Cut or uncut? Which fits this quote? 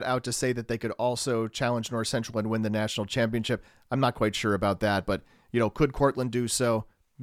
uncut